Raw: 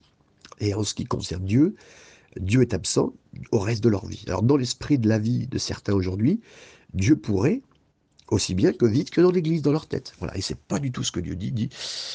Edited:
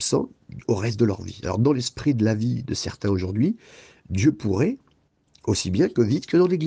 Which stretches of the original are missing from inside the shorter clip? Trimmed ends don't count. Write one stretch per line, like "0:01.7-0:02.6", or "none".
none